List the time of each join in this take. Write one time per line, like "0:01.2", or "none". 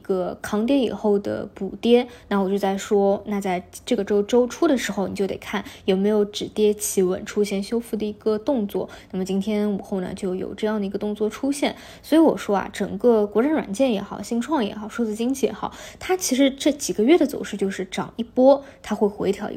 none

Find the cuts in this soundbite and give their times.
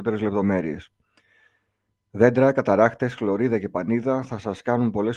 none

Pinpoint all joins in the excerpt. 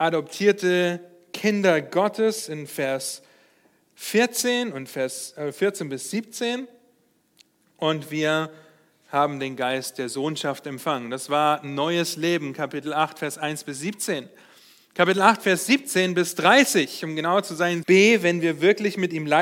0:17.8

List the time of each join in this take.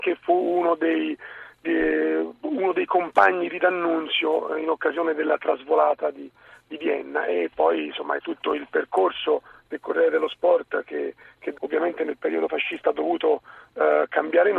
0:08.2
0:11.5

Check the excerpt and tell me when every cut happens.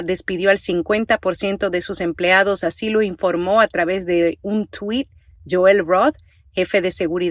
none

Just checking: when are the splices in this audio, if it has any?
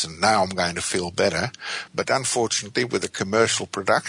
0:01.9

